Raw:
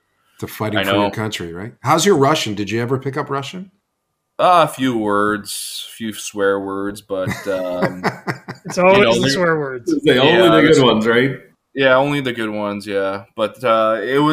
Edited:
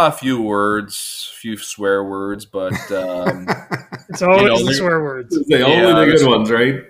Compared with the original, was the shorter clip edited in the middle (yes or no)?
no